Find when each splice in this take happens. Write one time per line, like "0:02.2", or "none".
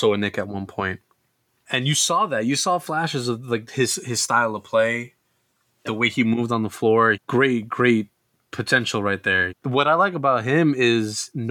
0:07.1
0:09.5